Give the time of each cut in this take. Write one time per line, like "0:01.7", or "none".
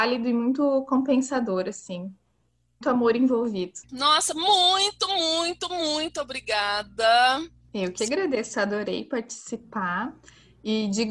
0:02.8
0:03.8